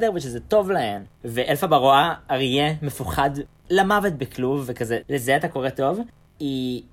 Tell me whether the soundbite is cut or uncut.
cut